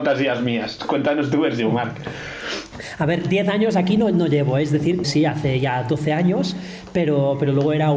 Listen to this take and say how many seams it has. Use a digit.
1